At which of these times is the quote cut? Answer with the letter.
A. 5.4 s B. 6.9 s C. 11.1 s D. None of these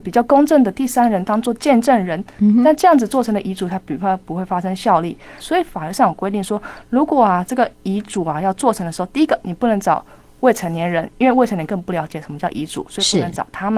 A